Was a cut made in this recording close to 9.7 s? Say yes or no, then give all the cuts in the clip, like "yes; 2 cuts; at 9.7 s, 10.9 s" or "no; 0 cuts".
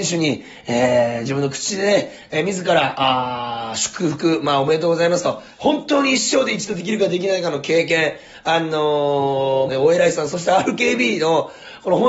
yes; 2 cuts; at 5.5 s, 9.7 s